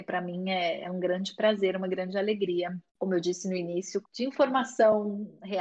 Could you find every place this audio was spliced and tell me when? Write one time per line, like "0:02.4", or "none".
0:02.9
0:04.0